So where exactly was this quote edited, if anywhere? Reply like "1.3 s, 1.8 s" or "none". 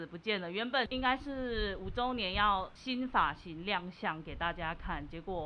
none